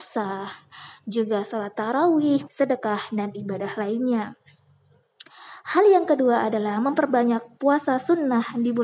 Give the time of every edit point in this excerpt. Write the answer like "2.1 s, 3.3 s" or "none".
2.5 s